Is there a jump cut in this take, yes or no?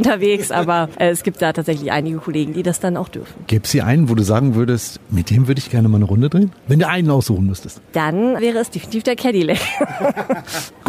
no